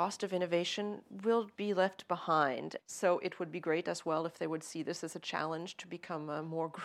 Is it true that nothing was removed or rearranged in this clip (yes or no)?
no